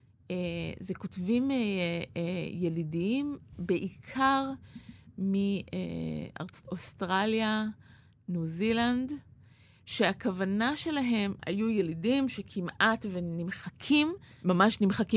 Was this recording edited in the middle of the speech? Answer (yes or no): yes